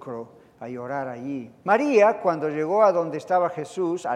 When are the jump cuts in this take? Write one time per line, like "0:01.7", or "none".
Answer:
0:01.6